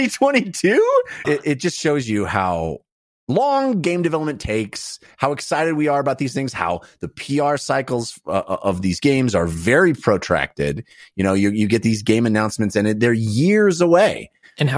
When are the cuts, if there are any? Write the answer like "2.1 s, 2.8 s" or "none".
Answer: 1.2 s